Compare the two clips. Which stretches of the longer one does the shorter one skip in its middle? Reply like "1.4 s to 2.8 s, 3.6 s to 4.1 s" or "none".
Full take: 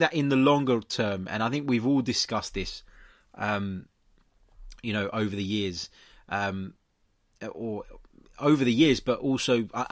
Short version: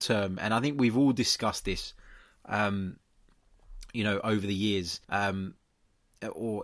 5.9 s to 6.2 s